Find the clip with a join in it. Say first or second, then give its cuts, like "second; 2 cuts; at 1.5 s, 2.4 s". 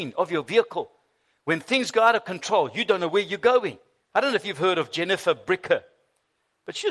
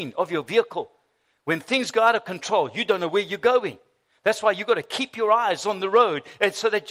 first; 1 cut; at 4.0 s